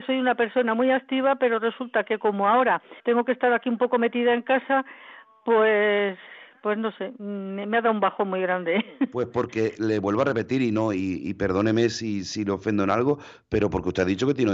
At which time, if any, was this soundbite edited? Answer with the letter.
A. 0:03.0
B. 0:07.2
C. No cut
A